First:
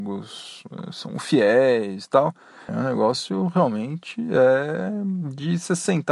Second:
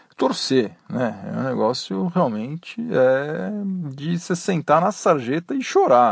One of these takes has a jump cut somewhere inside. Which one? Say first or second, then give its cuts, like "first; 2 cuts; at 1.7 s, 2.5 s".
first; 1 cut; at 2.7 s